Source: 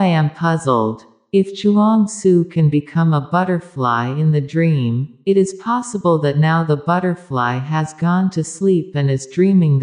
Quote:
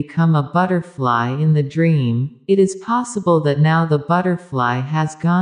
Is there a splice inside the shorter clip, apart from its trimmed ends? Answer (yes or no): no